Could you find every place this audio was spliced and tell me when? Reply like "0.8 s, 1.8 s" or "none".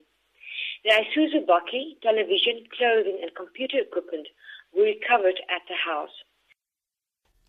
none